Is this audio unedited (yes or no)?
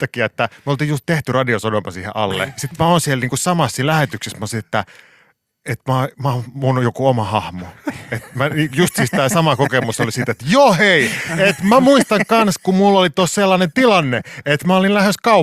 yes